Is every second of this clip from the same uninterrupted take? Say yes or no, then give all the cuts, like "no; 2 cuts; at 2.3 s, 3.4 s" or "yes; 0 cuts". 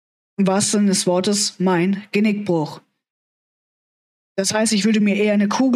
yes; 0 cuts